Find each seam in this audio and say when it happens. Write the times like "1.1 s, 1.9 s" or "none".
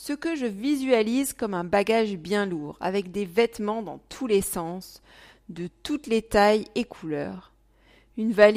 none